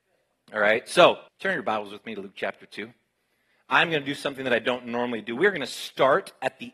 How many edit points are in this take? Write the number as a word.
one